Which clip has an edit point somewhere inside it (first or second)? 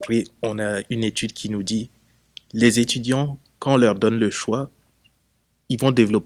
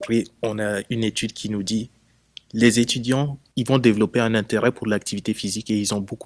second